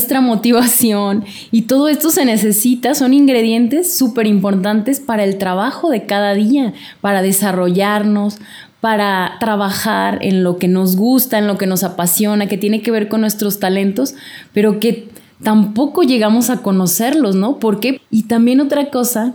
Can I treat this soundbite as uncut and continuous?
no; 1 cut; at 18.0 s

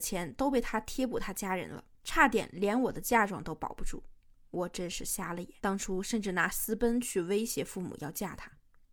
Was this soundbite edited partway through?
yes; 1 cut; at 5.6 s

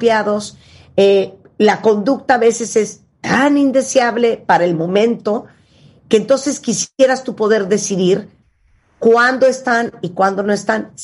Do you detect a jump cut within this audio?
no; 0 cuts

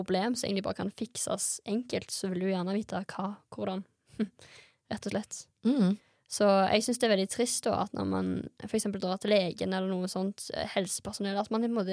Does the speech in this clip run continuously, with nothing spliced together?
yes; 0 cuts

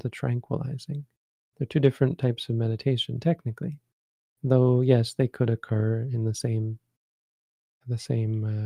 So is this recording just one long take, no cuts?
yes; 0 cuts

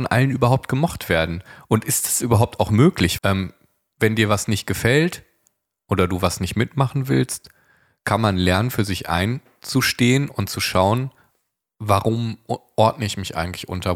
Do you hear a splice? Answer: yes; 1 cut; at 3.2 s

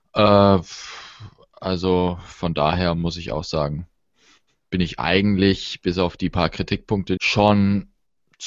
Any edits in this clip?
yes; 1 cut; at 7.2 s

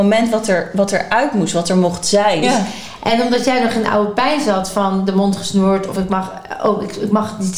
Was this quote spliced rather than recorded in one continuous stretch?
yes; 1 cut; at 2.4 s

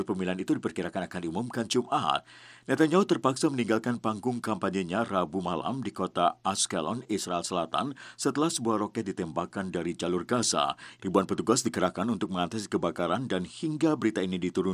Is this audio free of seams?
no; 1 cut; at 11.0 s

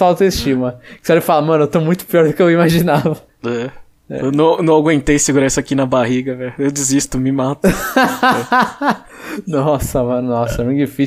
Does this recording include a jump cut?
no; 0 cuts

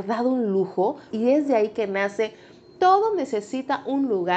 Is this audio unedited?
no; 1 cut; at 1.1 s

